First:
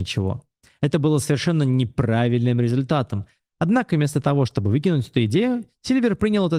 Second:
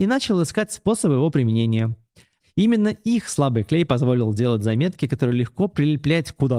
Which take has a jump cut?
second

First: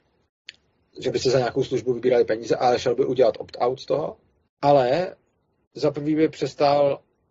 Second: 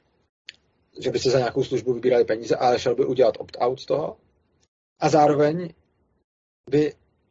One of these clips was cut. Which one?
first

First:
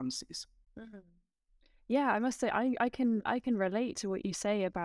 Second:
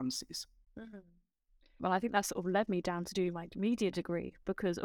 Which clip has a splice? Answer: second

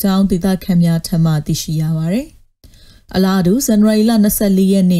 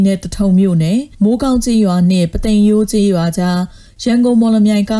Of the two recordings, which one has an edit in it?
second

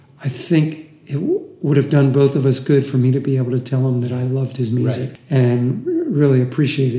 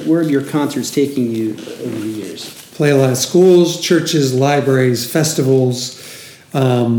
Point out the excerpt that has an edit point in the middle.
first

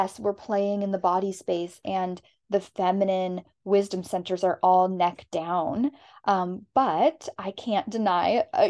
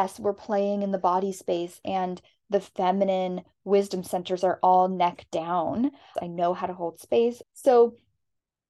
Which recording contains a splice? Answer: second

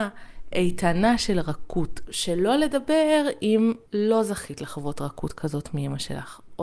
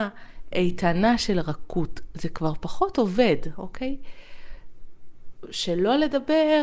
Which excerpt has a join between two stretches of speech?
first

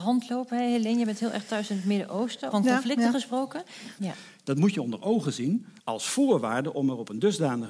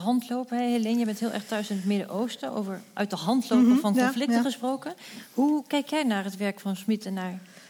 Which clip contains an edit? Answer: first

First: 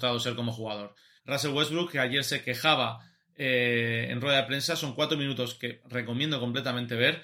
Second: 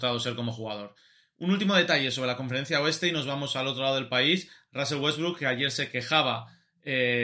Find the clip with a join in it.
first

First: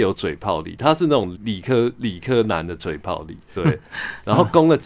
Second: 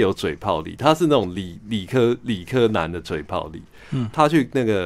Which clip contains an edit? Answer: first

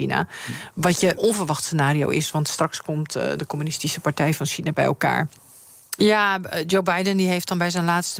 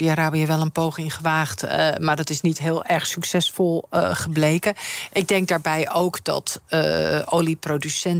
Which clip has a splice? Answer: first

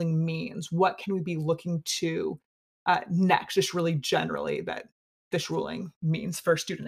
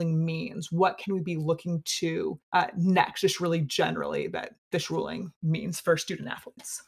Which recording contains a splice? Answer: second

